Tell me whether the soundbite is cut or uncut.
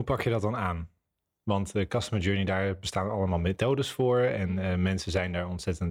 uncut